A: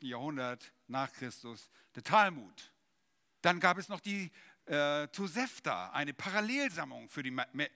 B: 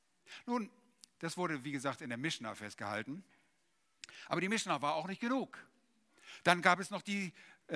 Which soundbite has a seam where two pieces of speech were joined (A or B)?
A